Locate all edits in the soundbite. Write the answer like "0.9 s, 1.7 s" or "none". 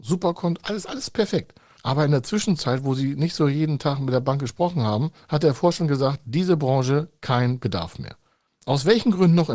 none